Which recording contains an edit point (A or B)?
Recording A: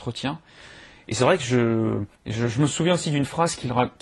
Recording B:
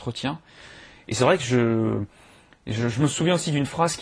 A